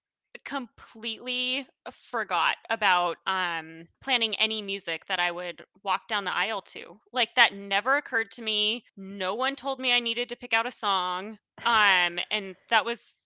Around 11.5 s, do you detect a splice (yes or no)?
no